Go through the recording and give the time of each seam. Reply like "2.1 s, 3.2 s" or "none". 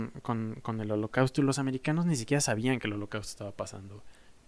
none